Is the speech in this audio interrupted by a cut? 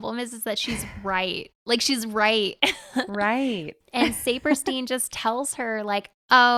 no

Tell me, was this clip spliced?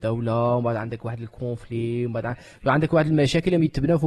no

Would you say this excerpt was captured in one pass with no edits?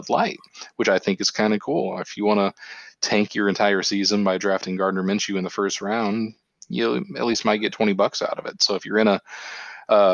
yes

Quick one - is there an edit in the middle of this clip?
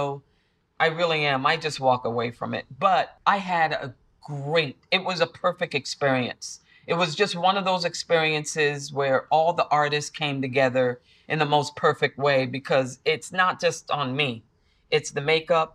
no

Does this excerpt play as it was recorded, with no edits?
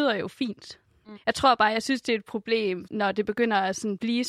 no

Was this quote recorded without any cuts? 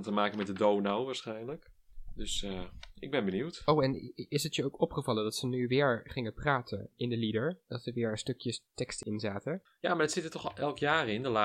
yes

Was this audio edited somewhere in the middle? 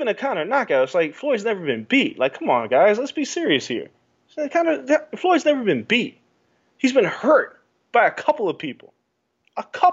no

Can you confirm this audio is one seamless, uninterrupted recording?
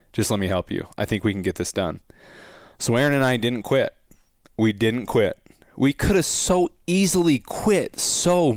yes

